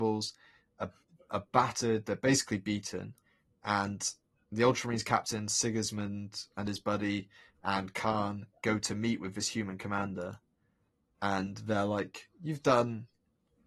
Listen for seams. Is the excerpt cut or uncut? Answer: uncut